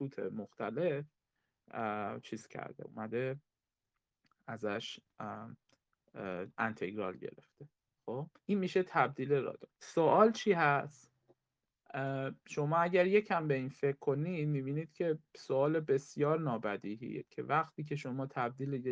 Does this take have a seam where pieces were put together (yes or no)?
yes